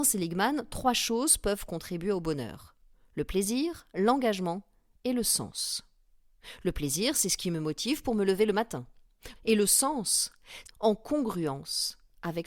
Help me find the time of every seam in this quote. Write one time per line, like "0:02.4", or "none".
0:09.3
0:10.6